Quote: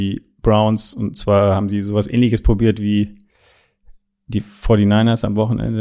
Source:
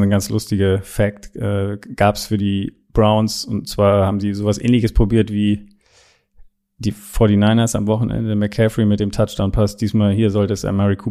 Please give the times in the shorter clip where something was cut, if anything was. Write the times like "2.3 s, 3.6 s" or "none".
none